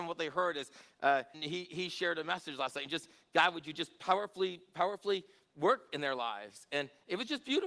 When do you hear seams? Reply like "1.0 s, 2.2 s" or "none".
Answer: 1.3 s